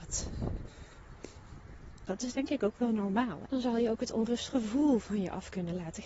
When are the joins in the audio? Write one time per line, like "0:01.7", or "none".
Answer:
0:02.1
0:03.5